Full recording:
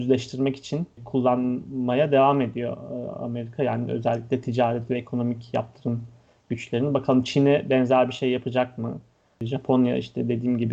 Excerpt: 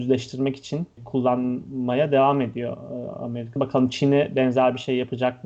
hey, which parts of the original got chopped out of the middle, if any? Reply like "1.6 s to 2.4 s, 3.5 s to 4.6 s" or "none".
3.6 s to 6.9 s

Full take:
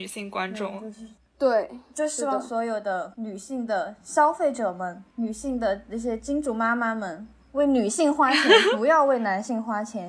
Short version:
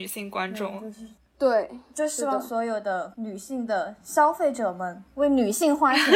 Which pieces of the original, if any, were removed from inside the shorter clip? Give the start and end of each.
5.1 s to 7.4 s

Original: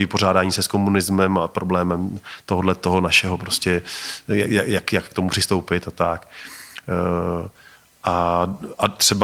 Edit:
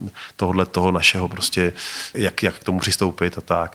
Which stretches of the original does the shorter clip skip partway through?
4.2 s to 4.6 s

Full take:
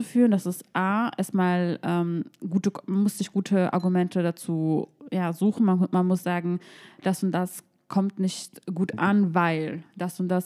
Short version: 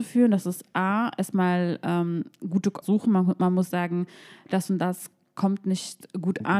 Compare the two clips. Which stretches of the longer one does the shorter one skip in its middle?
2.8 s to 5.3 s

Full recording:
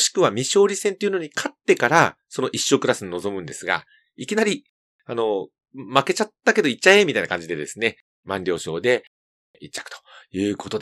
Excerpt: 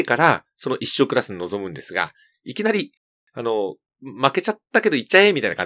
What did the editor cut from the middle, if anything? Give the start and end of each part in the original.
none

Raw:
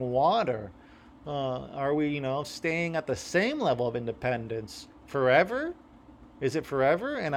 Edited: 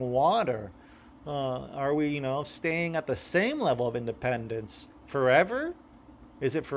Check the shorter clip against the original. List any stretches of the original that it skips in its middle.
none

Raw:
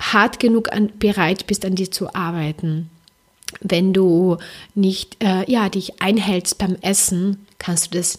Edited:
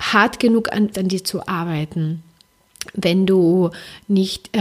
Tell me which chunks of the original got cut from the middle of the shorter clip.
0.9 s to 1.6 s

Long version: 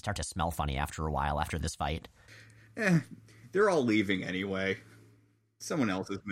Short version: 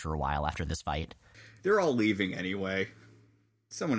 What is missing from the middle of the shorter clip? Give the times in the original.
2.5 s to 3.5 s

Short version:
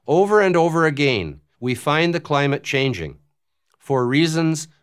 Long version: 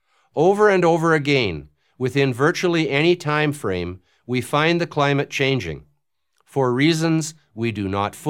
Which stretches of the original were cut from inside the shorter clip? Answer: 1.8 s to 4.2 s

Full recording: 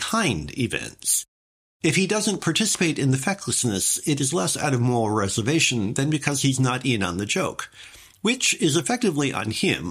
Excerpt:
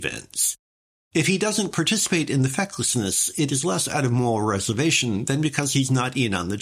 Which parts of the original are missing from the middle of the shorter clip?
none

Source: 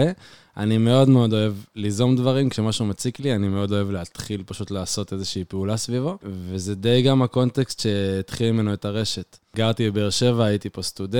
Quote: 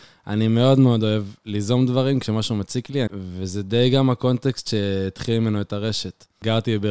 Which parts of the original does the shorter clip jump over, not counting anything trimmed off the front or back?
3.4 s to 6.2 s

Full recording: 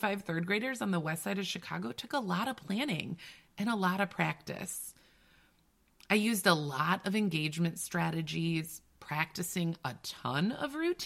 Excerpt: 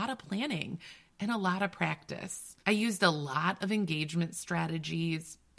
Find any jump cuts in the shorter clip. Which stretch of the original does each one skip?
5.0 s to 6.1 s

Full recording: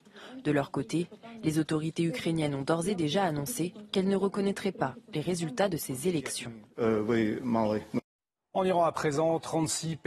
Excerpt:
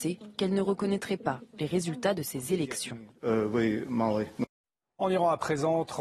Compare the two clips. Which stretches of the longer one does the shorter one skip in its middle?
none

